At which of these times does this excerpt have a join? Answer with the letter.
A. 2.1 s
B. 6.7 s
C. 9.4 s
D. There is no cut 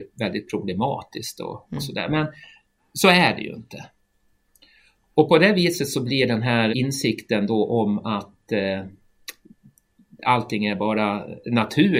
B